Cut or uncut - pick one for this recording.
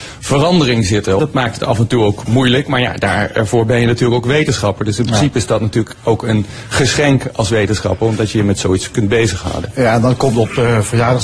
cut